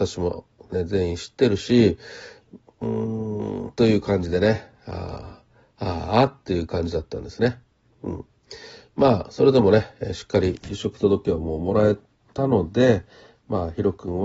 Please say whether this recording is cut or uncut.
uncut